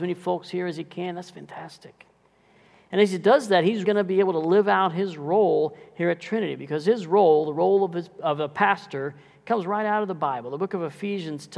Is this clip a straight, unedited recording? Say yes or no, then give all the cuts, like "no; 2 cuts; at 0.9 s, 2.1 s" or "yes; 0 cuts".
no; 1 cut; at 3.8 s